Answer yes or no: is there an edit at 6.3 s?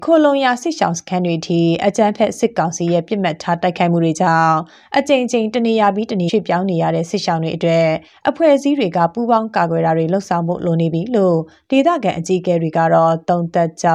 yes